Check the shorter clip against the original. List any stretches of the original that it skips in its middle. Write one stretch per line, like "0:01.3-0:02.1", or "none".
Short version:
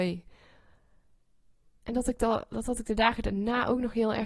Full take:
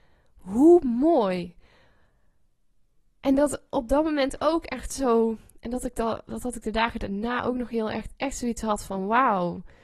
0:03.1-0:05.6